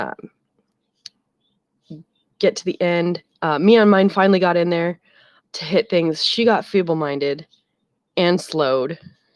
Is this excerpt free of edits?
no; 1 cut; at 5.4 s

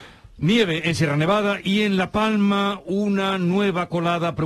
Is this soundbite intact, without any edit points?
yes; 0 cuts

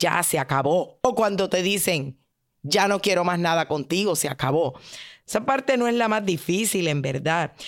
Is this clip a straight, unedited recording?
yes; 0 cuts

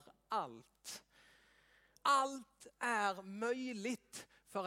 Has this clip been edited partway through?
yes; 1 cut; at 2.0 s

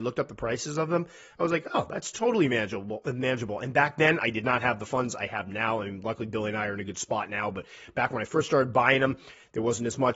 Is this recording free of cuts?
yes; 0 cuts

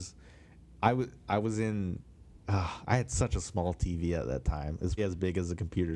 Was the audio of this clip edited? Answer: yes; 2 cuts; at 2.4 s, 5.0 s

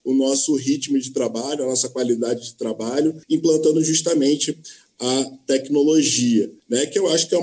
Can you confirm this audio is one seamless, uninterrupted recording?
yes; 0 cuts

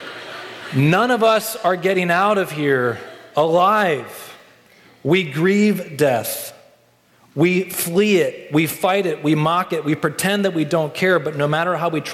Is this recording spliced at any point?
no; 0 cuts

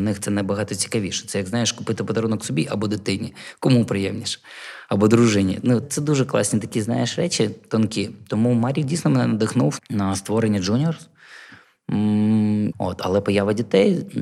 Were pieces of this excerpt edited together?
yes; 3 cuts; at 5.8 s, 9.8 s, 12.7 s

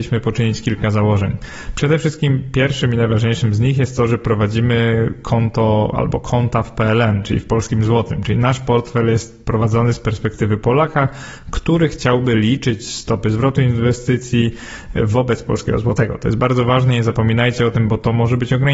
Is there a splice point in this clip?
no; 0 cuts

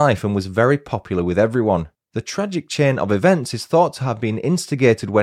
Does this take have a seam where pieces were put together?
yes; 1 cut; at 1.9 s

